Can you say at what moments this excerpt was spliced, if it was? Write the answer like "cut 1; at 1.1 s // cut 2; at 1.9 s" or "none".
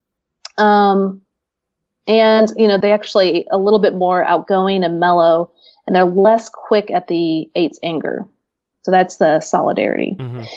cut 1; at 2.8 s